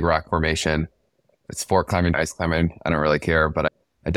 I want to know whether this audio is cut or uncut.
cut